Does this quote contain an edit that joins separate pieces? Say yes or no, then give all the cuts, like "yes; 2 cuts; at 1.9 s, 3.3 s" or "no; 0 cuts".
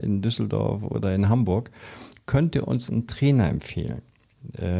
no; 0 cuts